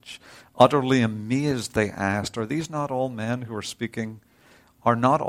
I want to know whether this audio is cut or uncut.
uncut